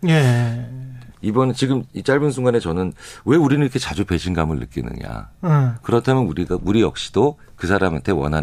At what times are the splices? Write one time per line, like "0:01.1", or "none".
0:01.1